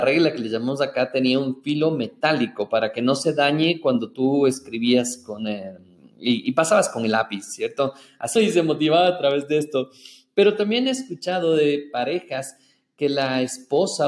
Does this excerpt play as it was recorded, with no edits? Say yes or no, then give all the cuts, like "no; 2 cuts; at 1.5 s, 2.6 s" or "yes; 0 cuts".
no; 1 cut; at 8.3 s